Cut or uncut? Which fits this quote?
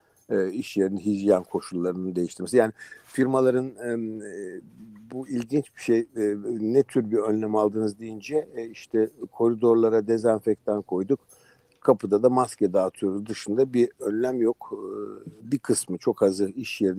cut